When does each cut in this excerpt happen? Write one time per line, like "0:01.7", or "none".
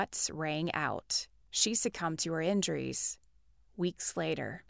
0:01.4

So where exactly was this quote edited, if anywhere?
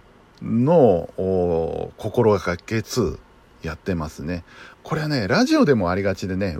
0:02.8
0:04.7

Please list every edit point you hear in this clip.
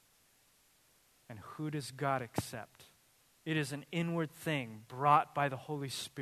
0:03.4

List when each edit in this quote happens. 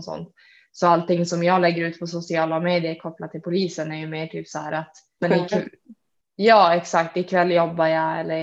0:05.2

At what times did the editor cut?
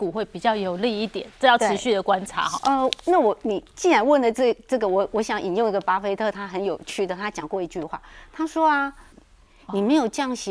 0:02.6
0:09.1

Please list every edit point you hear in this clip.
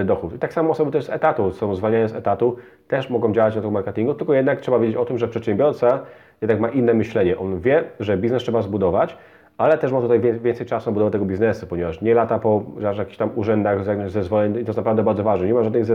none

